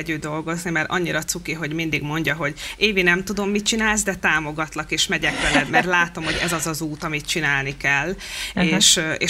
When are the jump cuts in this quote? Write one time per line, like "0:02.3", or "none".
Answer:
0:05.7